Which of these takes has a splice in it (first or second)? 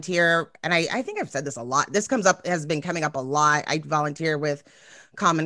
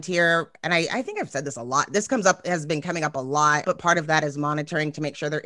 second